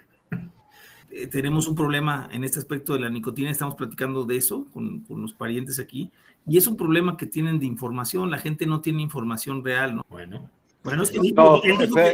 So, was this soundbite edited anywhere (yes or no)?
yes